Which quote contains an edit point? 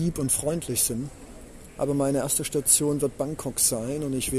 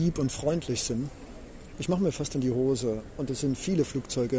second; 1 cut; at 1.7 s

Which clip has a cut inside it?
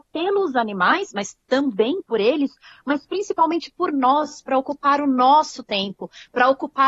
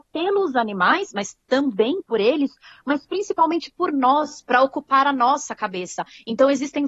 second; 1 cut; at 4.4 s

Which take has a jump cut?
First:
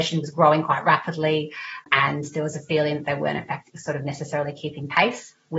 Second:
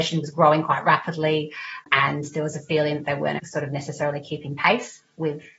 second; 1 cut; at 3.4 s

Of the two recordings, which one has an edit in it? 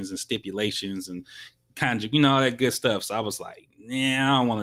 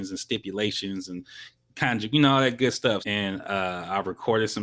second; 1 cut; at 3.0 s

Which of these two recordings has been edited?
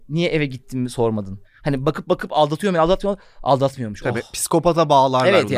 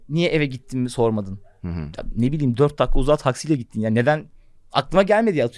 first; 1 cut; at 1.4 s

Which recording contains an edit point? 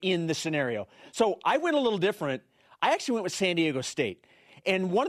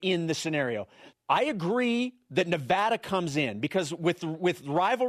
second; 1 cut; at 1.1 s

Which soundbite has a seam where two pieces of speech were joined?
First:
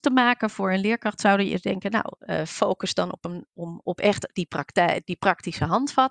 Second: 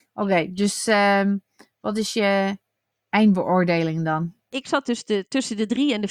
first; 1 cut; at 3.8 s

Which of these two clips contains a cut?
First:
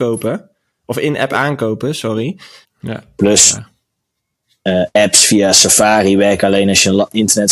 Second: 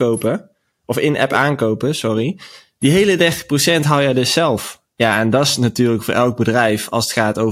first; 1 cut; at 2.6 s

